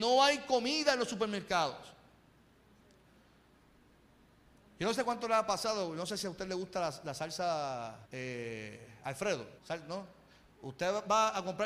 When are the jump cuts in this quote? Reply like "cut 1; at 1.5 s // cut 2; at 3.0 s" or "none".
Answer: cut 1; at 8.0 s // cut 2; at 9.6 s